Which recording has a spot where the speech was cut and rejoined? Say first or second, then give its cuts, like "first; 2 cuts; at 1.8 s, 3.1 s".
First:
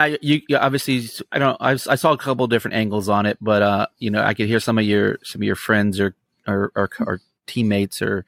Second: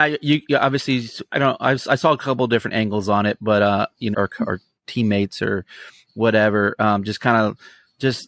second; 1 cut; at 4.1 s